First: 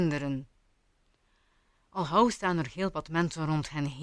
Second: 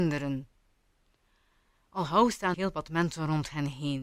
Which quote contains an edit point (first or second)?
second